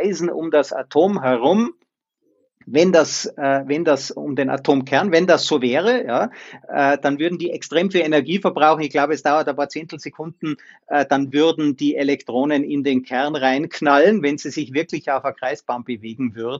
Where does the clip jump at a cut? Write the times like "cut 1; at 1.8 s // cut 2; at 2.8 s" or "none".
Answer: none